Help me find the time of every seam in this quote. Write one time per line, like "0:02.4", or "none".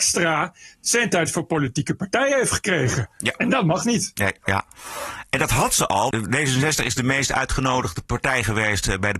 0:04.4
0:06.1